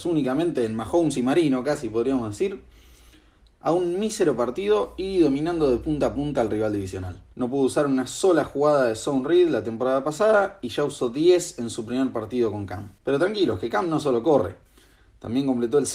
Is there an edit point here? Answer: yes; 2 cuts; at 7.3 s, 13.0 s

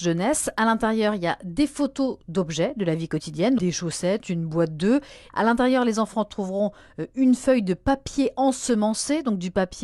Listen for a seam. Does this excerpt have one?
yes; 2 cuts; at 3.6 s, 5.3 s

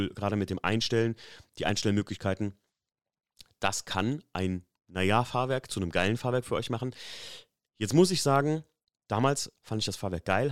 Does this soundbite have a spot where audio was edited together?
yes; 1 cut; at 7.7 s

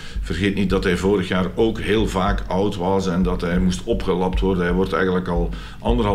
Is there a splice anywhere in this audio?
no; 0 cuts

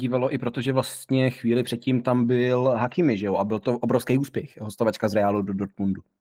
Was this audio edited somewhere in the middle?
no; 0 cuts

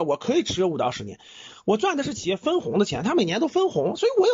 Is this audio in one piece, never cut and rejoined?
yes; 0 cuts

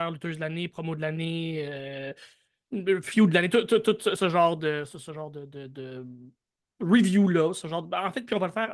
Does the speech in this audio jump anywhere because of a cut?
no; 0 cuts

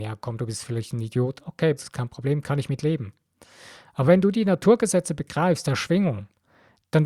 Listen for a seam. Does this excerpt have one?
yes; 1 cut; at 1.8 s

